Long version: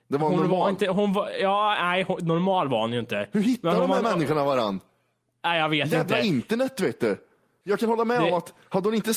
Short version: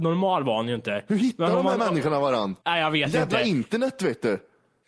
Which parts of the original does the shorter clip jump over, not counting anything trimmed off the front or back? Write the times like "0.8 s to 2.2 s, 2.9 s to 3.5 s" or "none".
4.8 s to 5.4 s